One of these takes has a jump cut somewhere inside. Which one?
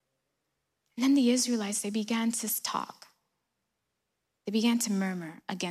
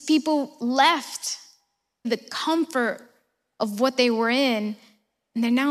second; 1 cut; at 2.0 s

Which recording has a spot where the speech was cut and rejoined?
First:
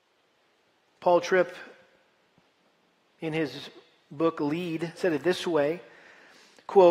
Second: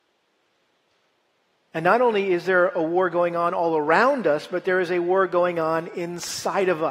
first; 1 cut; at 5.0 s

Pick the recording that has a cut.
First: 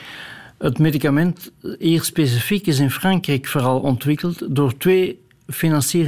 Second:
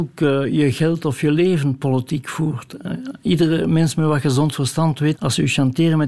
second; 1 cut; at 5.1 s

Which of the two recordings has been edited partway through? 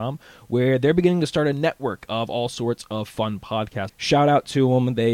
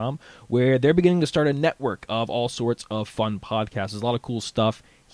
first; 1 cut; at 3.9 s

